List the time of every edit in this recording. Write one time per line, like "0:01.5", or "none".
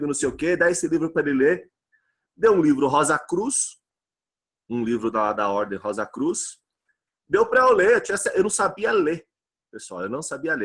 0:05.3